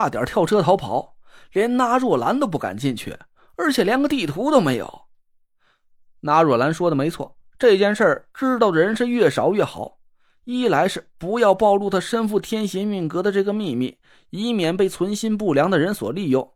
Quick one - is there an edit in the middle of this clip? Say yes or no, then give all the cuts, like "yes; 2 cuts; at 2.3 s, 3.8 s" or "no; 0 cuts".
no; 0 cuts